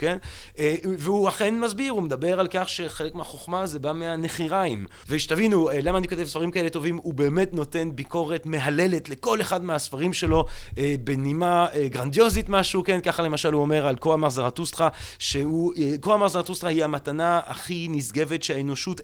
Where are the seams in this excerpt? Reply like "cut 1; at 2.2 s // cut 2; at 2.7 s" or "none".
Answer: cut 1; at 5.0 s